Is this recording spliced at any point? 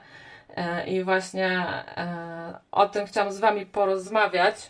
no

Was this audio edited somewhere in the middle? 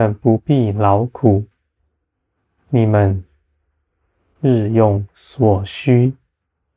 no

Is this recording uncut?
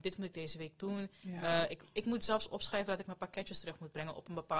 yes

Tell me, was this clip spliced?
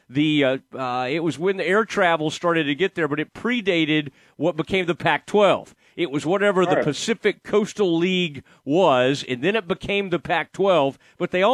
no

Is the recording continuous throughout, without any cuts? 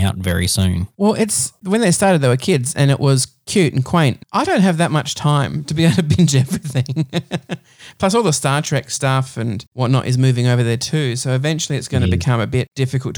no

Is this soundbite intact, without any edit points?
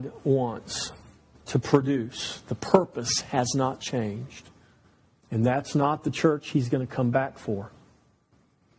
no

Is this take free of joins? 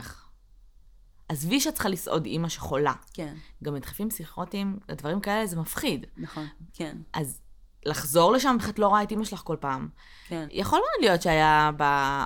no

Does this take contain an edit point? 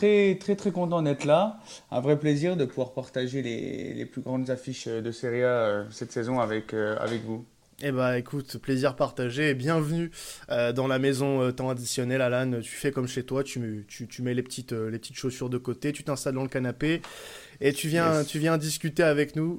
no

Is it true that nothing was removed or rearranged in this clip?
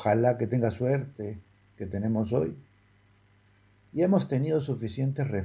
yes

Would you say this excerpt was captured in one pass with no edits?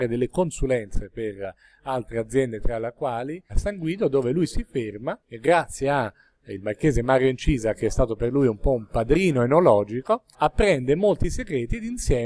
no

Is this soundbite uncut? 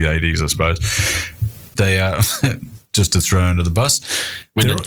no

